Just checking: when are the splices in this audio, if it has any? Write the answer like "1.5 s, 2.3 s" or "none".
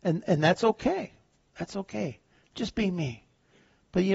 none